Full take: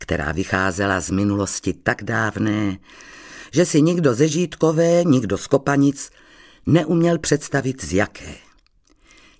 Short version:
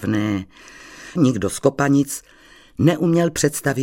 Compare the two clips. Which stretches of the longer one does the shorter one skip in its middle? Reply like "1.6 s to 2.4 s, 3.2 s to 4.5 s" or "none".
3.5 s to 5.0 s